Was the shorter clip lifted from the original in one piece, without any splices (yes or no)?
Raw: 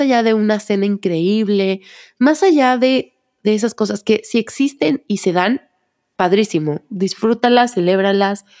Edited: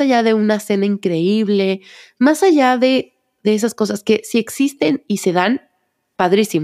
yes